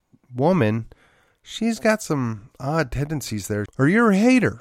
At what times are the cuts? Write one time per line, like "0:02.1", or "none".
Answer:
0:03.7